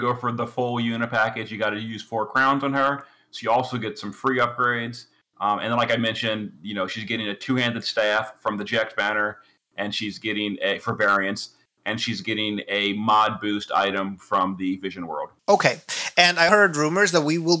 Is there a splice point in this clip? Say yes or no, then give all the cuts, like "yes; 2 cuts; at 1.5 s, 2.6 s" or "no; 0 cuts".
yes; 2 cuts; at 15.4 s, 16.5 s